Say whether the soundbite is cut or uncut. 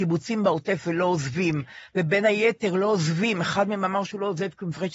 uncut